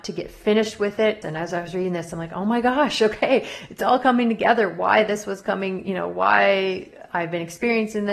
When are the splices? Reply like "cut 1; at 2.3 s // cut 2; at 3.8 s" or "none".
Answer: cut 1; at 1.2 s